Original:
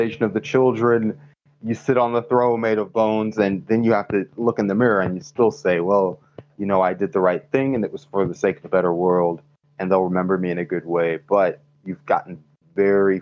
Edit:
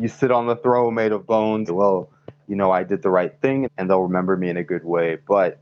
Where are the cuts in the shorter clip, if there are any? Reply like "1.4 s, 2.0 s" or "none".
1.7 s, 3.6 s